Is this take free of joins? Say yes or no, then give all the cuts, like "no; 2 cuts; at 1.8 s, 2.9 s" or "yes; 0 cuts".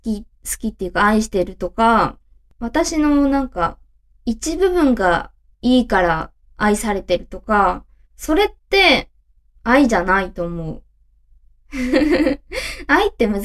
yes; 0 cuts